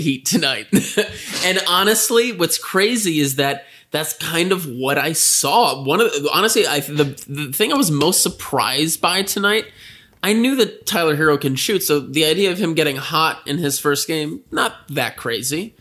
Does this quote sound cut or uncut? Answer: uncut